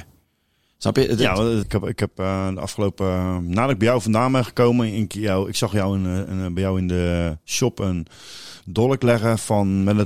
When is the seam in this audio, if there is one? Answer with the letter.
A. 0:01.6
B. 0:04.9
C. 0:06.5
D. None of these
A